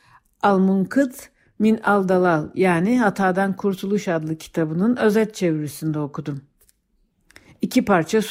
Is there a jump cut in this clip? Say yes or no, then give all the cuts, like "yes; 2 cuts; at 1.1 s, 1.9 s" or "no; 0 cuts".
no; 0 cuts